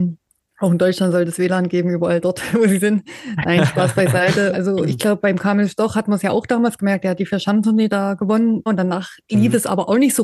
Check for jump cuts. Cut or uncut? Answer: cut